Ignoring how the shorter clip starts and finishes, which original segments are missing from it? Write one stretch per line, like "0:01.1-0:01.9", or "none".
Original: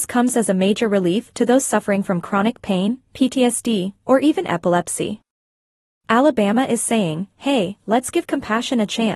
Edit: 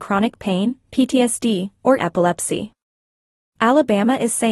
0:04.2-0:04.5